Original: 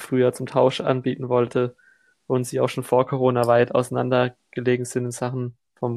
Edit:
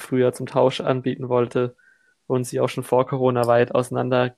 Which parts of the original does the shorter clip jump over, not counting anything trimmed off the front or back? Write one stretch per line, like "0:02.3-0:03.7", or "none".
none